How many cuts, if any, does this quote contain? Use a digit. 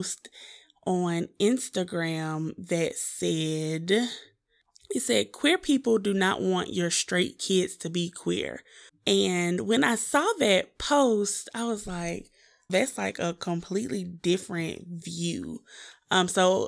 2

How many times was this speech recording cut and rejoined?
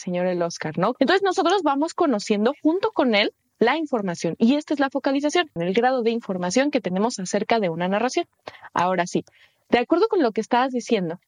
2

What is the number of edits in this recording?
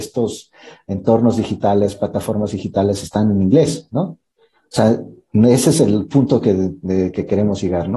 0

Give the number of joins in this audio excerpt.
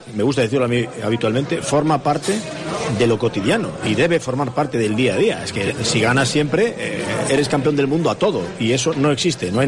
0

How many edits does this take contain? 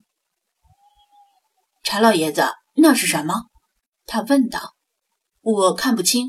0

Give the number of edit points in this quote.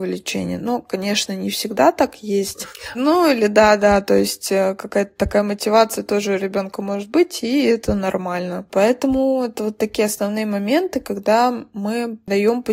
1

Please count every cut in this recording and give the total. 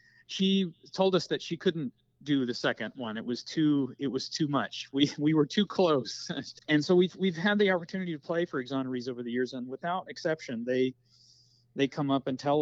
1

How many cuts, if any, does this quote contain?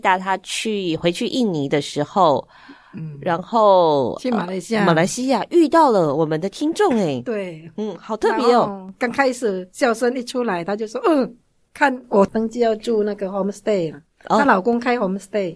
0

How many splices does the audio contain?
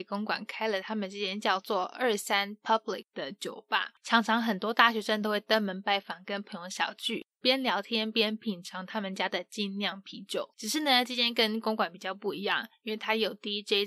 1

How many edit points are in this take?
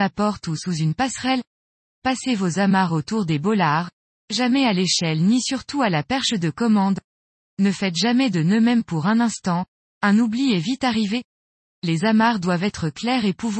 0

